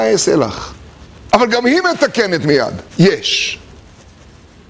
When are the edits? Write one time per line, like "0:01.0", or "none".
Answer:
0:01.3
0:02.9